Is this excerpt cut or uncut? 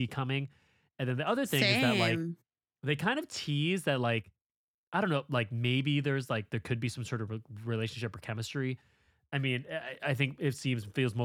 uncut